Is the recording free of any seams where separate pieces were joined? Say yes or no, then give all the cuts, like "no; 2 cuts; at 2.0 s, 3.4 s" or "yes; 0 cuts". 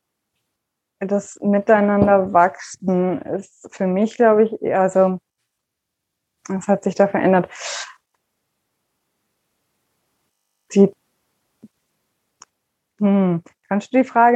yes; 0 cuts